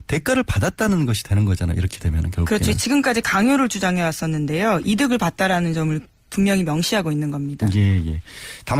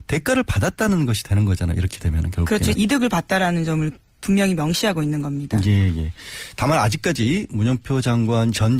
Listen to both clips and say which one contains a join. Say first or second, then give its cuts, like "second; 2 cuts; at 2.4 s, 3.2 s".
second; 1 cut; at 2.8 s